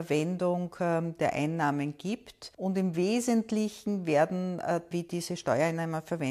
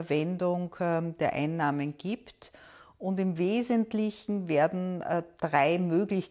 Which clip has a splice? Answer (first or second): first